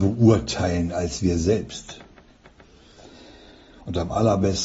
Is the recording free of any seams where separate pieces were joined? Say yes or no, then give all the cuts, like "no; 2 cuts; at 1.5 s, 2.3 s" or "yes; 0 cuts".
yes; 0 cuts